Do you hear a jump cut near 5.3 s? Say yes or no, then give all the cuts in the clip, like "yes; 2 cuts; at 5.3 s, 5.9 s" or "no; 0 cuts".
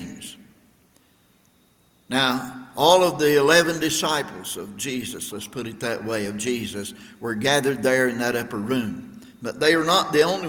yes; 1 cut; at 5.3 s